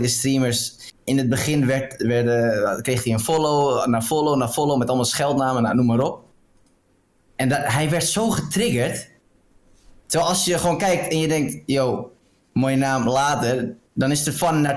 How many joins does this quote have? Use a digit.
0